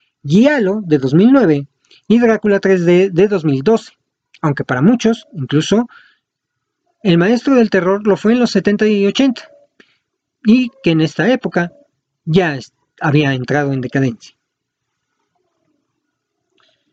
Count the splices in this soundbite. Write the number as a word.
zero